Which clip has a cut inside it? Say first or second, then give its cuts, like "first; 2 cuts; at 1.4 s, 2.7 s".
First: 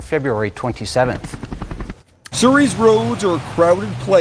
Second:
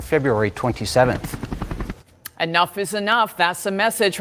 first; 1 cut; at 2.3 s